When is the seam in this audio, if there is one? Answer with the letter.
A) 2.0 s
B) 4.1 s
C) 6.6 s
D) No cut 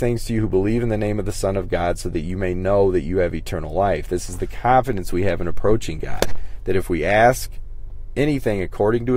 D